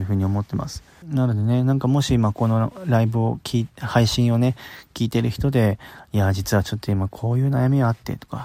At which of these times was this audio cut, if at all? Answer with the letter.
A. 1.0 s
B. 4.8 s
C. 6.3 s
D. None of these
A